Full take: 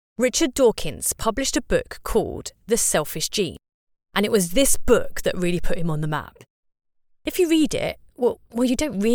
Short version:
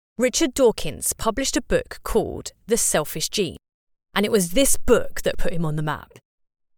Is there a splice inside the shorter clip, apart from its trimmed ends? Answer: yes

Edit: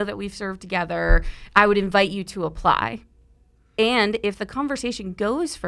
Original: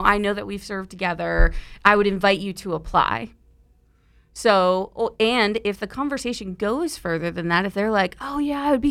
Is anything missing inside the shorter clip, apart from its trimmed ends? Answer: yes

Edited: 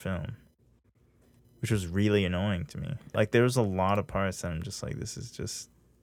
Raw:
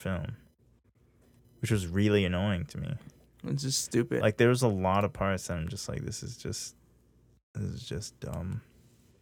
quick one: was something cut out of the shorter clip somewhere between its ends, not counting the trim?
yes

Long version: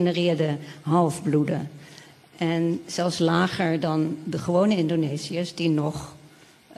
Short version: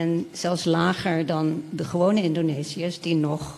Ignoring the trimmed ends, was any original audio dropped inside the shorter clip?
no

